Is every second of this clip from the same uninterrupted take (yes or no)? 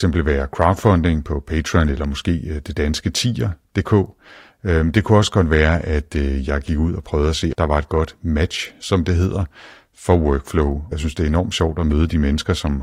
no